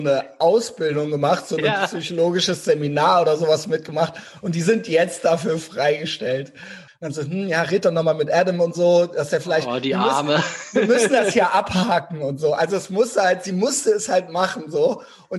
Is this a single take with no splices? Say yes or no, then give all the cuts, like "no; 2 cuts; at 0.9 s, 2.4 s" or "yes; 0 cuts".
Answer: no; 1 cut; at 6.9 s